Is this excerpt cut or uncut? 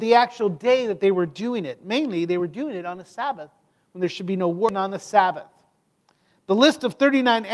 uncut